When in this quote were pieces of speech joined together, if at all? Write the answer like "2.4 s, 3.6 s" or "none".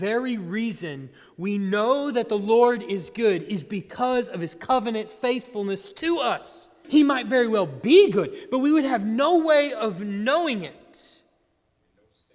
6.8 s